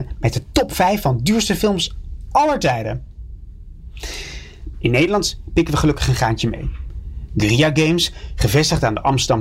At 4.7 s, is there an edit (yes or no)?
yes